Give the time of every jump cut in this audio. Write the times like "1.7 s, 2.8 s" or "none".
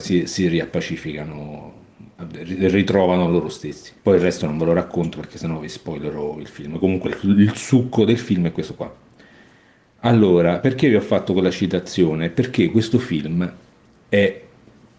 4.0 s

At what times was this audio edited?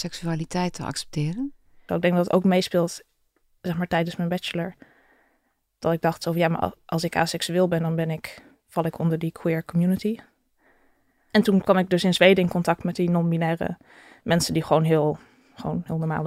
1.9 s, 11.2 s

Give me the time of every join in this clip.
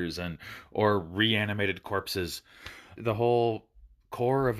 3.0 s

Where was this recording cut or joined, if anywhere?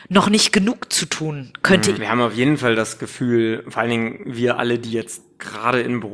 1.9 s

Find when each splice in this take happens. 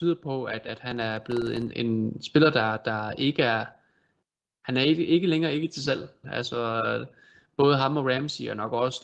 1.7 s, 6.2 s

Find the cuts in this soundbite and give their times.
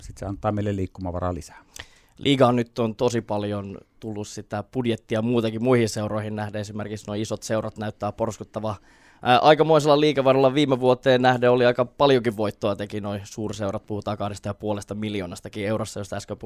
none

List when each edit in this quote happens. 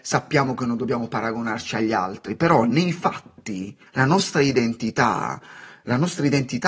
3.9 s

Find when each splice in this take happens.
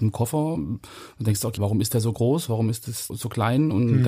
1.6 s, 3.1 s

